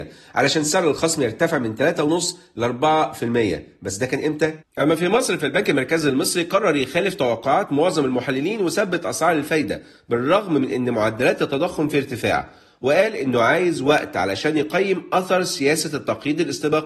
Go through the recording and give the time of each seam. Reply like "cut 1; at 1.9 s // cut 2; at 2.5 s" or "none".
cut 1; at 4.6 s